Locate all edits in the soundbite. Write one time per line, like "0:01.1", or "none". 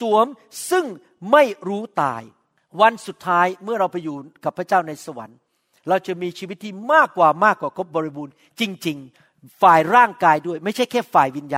0:09.1